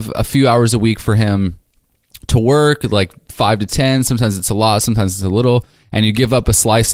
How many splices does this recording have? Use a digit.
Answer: 0